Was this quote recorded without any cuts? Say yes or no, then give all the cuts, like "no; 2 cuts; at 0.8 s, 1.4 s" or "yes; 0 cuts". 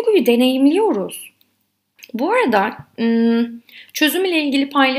no; 1 cut; at 2.0 s